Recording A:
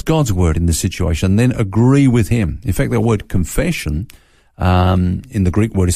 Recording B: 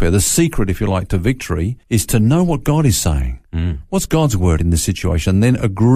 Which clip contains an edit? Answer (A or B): B